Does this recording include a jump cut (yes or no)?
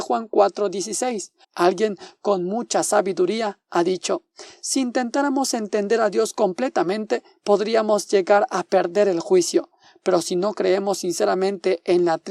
yes